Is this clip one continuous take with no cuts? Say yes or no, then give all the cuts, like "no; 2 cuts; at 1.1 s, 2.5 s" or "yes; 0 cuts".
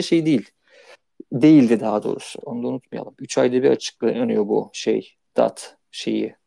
no; 1 cut; at 2.4 s